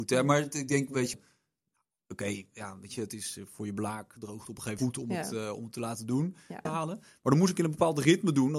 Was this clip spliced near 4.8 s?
yes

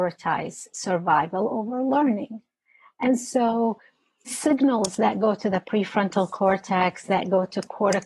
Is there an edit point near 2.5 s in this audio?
no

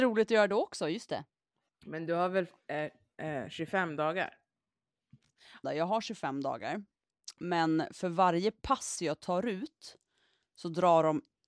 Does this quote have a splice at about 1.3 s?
no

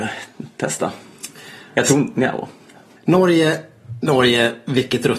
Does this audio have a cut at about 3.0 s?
yes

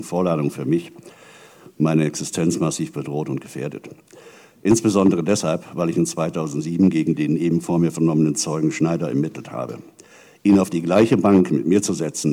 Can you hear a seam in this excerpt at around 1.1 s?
no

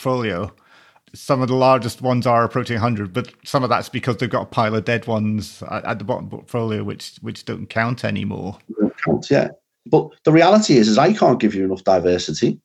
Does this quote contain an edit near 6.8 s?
no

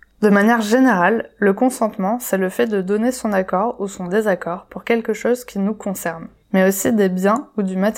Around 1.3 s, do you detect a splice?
no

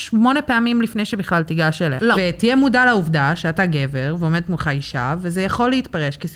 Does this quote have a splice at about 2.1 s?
yes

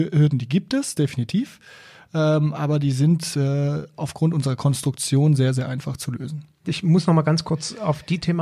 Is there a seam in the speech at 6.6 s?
yes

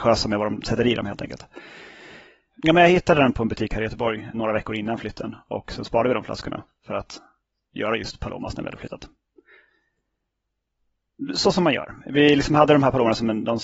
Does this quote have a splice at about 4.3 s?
yes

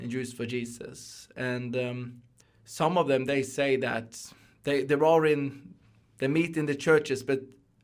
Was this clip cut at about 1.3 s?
no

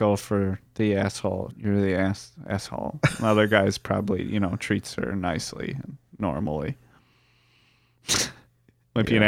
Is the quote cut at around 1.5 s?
yes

